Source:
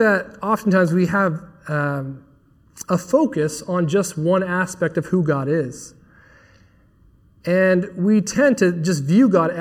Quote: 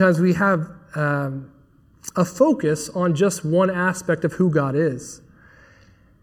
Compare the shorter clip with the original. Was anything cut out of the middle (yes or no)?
no